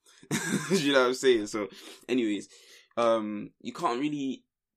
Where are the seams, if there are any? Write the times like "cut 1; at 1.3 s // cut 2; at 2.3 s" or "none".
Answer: none